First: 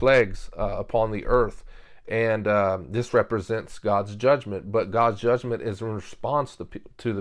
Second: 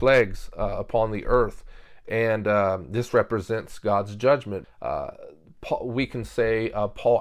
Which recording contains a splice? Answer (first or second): second